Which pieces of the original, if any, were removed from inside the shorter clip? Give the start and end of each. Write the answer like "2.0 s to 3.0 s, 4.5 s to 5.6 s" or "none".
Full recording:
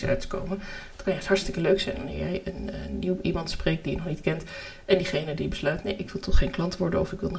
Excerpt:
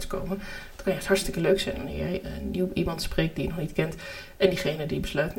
2.4 s to 2.7 s